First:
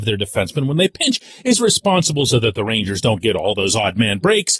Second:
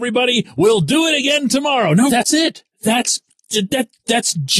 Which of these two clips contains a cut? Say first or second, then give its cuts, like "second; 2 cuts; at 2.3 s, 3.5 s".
second; 1 cut; at 2.1 s